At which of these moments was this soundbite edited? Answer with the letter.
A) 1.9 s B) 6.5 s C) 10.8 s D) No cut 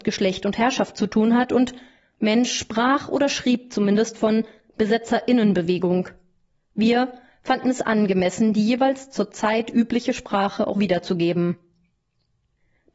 C